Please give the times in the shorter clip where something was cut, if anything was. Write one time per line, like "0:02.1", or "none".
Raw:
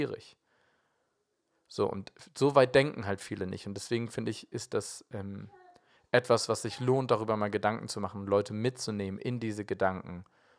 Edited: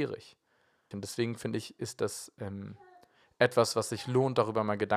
0:00.9

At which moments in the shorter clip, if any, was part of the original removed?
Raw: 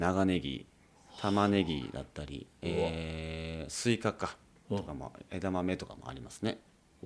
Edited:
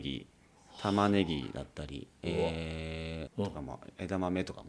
0:03.3

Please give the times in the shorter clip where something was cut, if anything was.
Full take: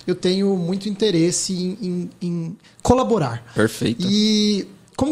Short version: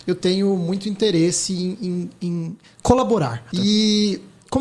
0:03.5

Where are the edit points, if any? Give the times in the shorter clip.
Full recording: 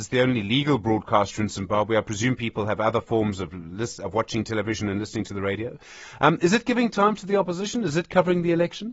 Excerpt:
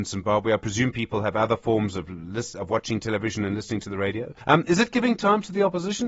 0:04.4

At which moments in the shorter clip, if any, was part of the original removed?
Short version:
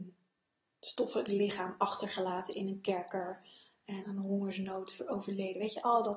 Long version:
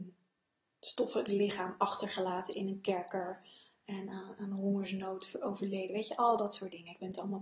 0:04.0

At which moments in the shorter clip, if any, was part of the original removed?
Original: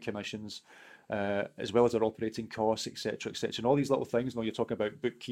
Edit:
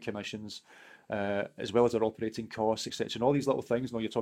0:02.9

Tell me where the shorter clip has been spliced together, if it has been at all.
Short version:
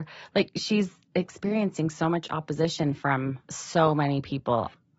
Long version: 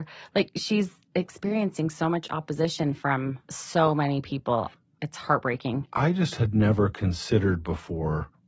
none

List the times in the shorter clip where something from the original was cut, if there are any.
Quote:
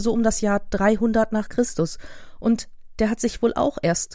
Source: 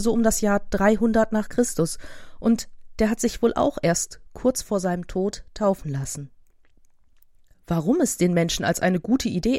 none

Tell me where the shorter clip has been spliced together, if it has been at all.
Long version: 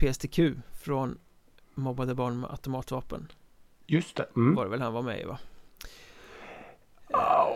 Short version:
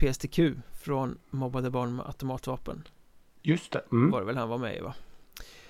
0:01.2

